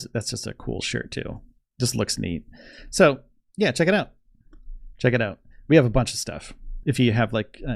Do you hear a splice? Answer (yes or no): yes